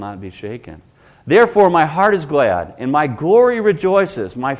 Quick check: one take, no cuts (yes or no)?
yes